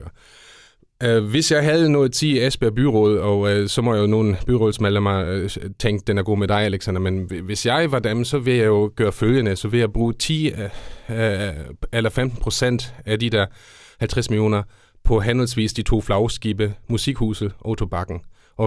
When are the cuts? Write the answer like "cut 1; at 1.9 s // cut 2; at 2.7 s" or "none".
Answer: none